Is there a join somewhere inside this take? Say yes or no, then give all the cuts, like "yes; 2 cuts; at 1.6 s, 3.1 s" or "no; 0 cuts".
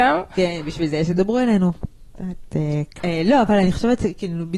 yes; 1 cut; at 3.0 s